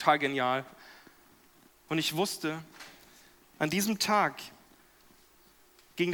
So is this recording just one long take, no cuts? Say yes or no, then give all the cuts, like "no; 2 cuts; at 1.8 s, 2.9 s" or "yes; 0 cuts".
no; 1 cut; at 1.7 s